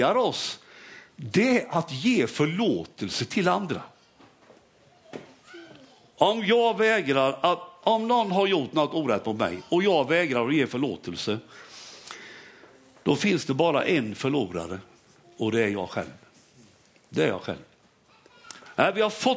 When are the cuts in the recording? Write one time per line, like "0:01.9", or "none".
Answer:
none